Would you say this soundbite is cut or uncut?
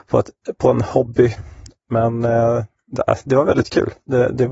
uncut